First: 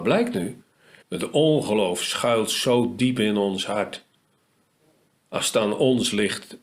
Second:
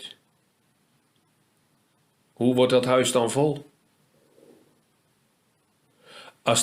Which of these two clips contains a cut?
first; 1 cut; at 1.0 s

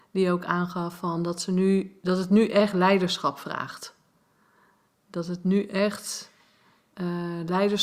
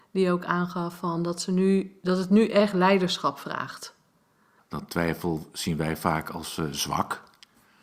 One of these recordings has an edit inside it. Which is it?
second; 1 cut; at 4.6 s

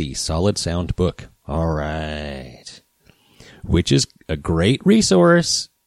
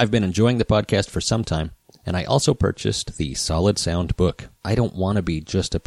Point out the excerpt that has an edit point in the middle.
second; 1 cut; at 4.6 s

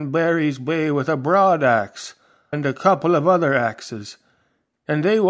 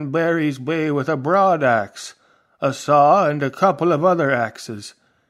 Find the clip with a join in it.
first; 1 cut; at 2.5 s

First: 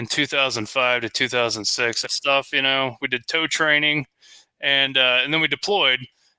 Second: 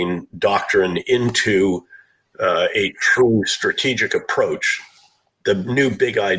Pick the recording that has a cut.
first; 1 cut; at 2.0 s

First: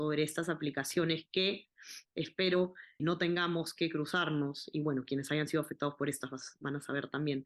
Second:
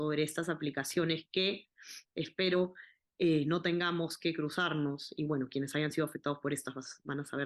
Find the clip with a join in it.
first; 1 cut; at 3.0 s

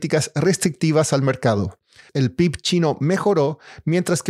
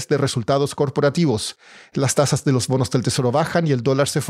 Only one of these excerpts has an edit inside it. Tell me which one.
first; 1 cut; at 2.1 s

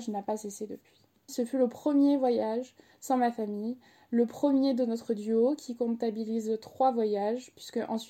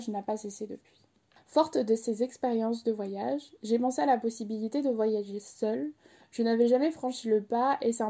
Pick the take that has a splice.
first; 1 cut; at 1.3 s

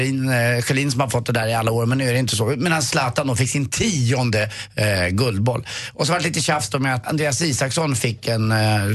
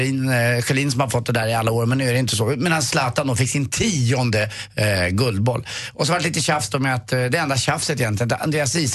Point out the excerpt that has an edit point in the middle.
first; 1 cut; at 7.0 s

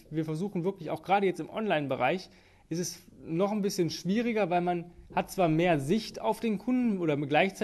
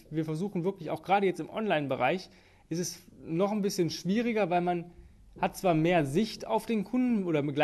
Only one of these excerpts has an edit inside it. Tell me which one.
first; 1 cut; at 5.1 s

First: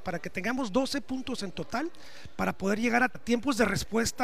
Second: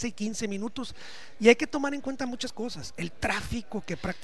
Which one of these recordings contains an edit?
first; 1 cut; at 3.1 s

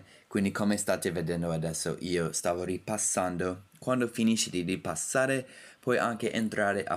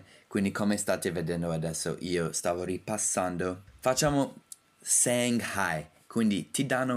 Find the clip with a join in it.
second; 1 cut; at 3.7 s

